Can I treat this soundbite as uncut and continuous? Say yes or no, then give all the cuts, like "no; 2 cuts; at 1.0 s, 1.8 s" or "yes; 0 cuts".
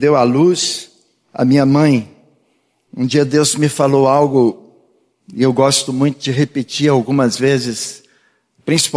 no; 1 cut; at 2.9 s